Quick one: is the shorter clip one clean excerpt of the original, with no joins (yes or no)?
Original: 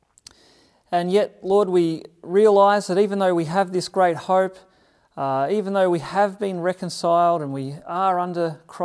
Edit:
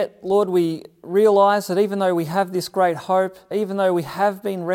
no